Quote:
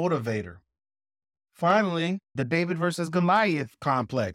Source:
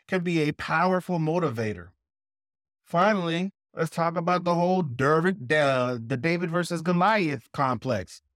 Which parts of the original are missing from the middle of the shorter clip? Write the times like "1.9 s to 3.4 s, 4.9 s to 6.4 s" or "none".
3.7 s to 6.1 s